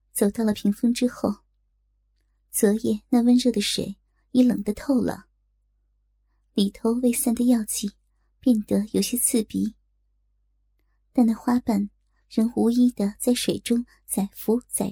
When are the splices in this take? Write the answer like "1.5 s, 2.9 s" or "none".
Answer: none